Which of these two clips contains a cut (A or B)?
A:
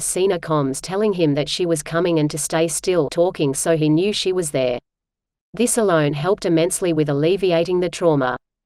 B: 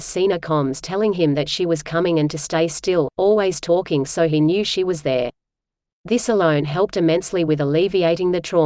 A